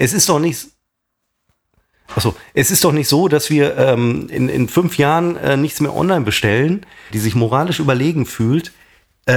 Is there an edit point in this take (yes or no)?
yes